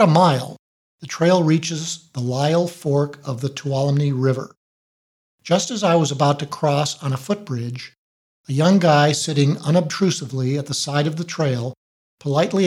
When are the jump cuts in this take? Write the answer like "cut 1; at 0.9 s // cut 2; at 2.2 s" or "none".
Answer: none